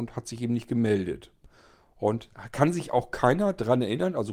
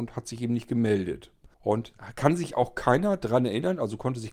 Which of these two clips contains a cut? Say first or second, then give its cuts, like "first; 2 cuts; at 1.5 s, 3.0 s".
second; 1 cut; at 1.5 s